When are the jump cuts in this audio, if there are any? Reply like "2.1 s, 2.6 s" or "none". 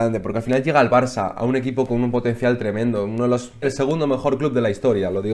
3.6 s